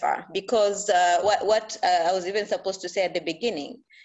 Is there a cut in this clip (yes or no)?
yes